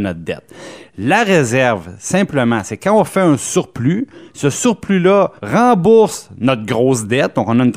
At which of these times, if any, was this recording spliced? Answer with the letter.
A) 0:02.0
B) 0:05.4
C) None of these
B